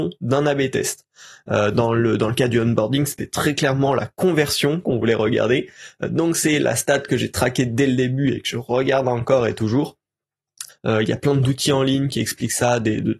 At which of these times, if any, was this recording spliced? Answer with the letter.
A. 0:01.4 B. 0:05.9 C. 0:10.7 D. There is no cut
C